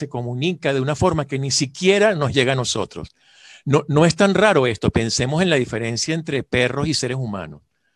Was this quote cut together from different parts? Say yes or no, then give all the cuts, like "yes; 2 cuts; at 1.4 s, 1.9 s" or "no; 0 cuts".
no; 0 cuts